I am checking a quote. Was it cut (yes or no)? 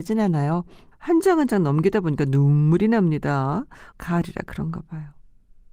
yes